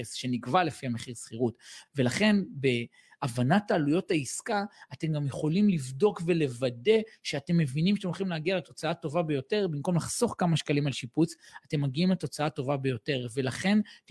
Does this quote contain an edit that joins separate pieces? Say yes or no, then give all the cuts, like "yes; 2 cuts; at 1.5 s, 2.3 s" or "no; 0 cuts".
no; 0 cuts